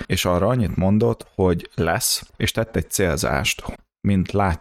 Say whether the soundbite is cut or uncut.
cut